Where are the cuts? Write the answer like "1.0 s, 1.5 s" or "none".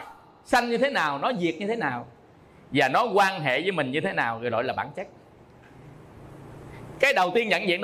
none